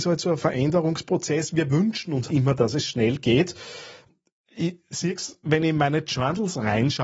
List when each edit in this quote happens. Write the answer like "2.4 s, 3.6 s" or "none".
2.3 s